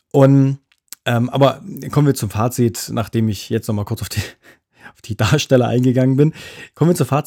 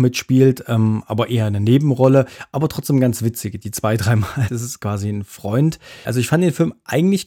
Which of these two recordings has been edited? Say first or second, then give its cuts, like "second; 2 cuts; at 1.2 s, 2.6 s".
second; 2 cuts; at 4.5 s, 6.0 s